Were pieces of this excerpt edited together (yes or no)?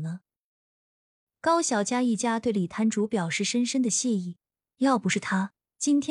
no